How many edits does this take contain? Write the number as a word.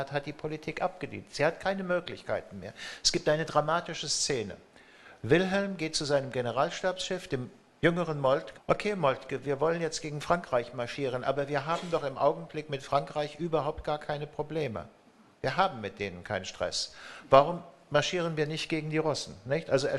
one